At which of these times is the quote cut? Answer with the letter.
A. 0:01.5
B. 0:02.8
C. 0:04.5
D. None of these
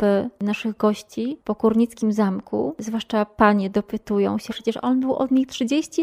C